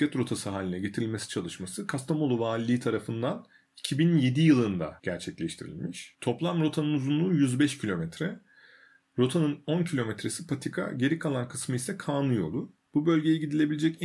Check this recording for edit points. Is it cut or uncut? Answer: uncut